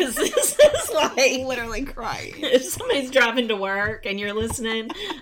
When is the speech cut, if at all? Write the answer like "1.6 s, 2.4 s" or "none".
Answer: none